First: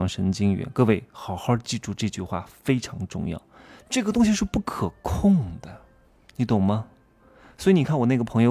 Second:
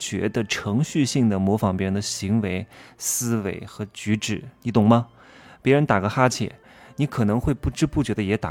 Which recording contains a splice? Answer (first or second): first